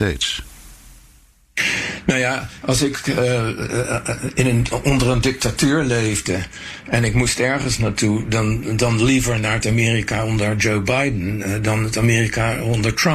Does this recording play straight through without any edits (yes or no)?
yes